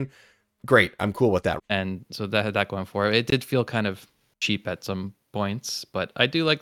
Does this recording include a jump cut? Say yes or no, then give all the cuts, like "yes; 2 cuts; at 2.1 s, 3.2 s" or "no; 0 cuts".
yes; 1 cut; at 1.6 s